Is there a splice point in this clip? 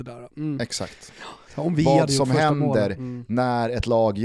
yes; 1 cut; at 1.5 s

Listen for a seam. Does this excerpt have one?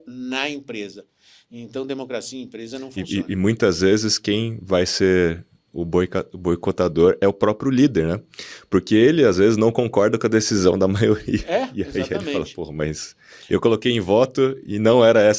no; 0 cuts

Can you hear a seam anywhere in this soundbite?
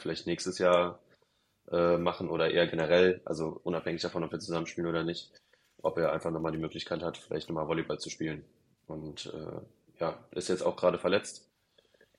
no; 0 cuts

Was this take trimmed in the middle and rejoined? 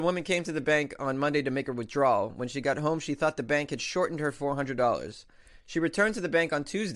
no; 0 cuts

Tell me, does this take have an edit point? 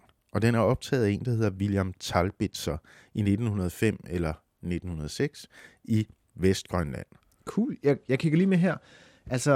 no; 0 cuts

